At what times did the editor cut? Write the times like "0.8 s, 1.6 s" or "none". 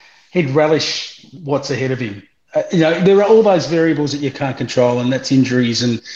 none

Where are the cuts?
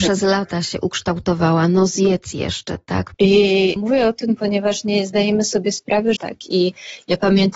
3.1 s, 6.2 s

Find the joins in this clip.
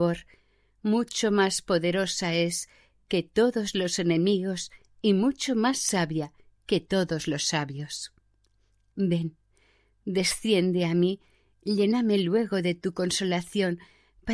8.9 s

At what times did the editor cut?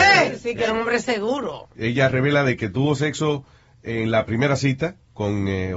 1.8 s

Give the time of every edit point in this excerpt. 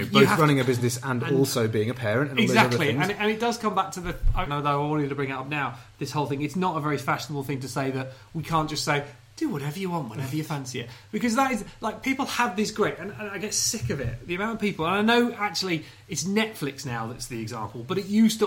4.5 s

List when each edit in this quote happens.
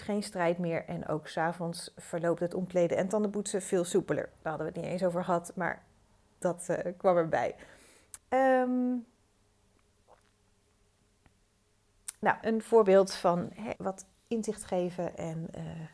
8.2 s, 12.4 s, 13.8 s

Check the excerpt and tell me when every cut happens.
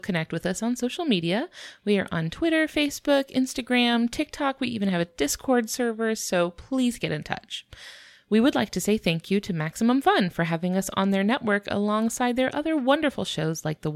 none

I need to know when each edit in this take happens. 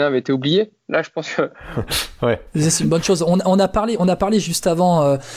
none

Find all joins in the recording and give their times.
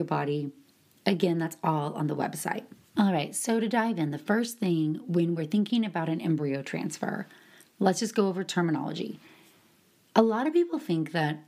2.8 s

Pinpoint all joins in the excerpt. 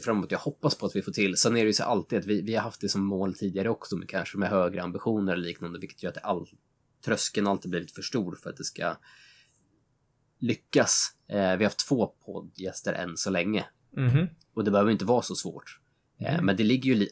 none

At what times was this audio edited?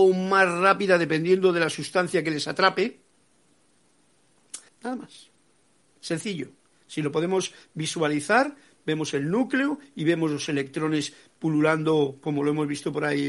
4.7 s

